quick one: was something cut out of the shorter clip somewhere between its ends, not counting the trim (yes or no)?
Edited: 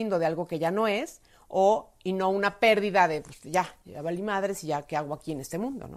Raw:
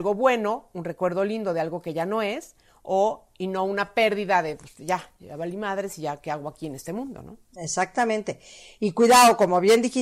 no